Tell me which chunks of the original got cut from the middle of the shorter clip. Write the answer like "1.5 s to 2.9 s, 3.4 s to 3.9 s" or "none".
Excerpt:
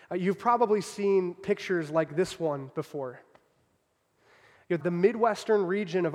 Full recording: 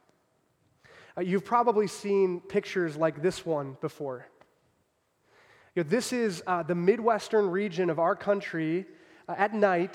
5.9 s to 6.6 s